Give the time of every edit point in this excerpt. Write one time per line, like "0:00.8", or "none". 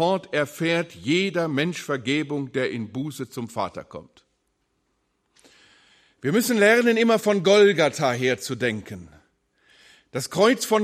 none